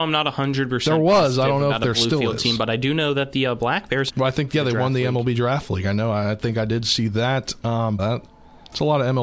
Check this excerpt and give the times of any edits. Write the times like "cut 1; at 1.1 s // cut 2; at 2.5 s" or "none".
cut 1; at 4.1 s // cut 2; at 8.0 s